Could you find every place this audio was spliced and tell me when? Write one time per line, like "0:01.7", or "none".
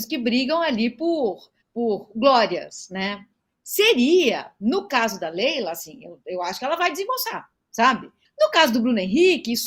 0:01.6
0:08.2